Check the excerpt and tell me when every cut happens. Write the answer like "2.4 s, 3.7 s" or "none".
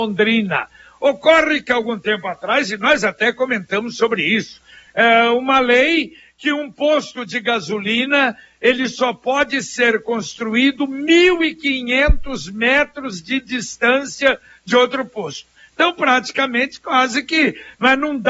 none